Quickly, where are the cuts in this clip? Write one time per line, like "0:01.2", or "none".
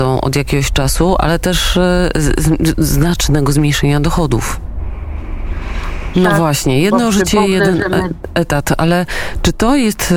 0:06.1